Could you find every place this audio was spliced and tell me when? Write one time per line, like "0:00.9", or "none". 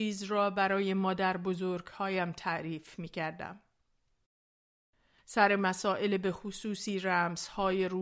0:05.2